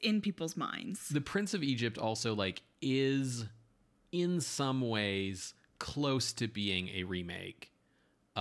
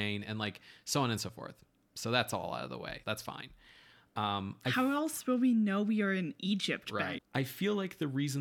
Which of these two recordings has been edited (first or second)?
second